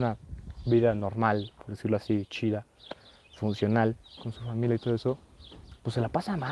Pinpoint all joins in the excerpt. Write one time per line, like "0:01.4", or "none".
none